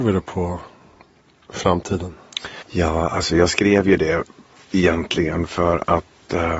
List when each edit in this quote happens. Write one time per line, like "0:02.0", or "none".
0:02.6

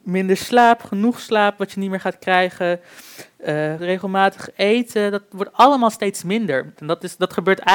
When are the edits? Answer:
0:03.8
0:06.8

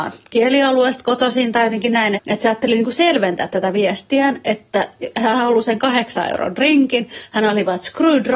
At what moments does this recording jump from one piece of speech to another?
0:02.2

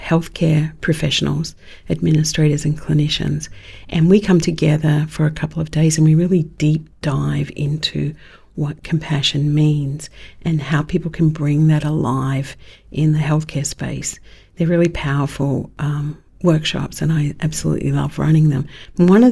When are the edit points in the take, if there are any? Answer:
none

